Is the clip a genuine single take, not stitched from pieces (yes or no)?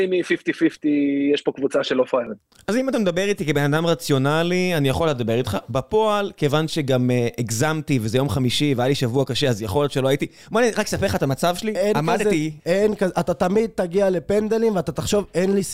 no